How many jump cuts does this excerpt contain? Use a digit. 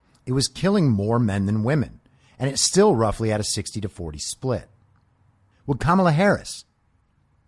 1